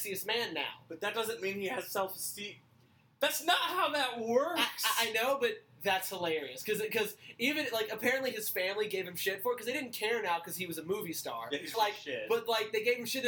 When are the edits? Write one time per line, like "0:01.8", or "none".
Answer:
0:11.7